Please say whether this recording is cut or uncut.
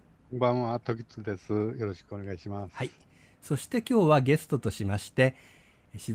uncut